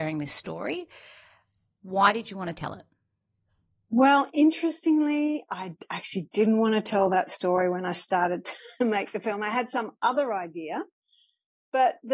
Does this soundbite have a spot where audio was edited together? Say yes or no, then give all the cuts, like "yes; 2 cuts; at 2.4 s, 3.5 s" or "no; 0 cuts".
no; 0 cuts